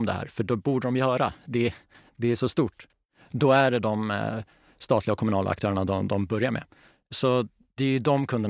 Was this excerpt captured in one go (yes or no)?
yes